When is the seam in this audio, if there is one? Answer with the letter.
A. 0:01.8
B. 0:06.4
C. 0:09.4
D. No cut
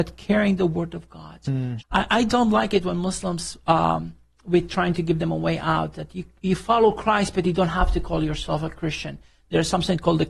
A